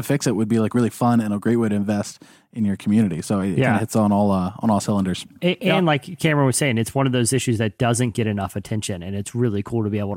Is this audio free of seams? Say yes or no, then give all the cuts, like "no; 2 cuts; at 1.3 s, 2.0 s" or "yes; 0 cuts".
yes; 0 cuts